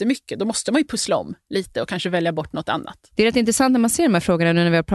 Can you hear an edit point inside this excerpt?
yes; 1 cut; at 3.1 s

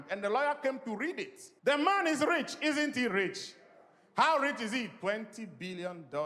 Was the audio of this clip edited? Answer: no; 0 cuts

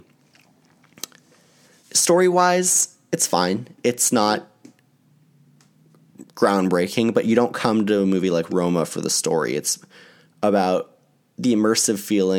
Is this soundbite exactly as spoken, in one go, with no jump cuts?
no; 1 cut; at 1.8 s

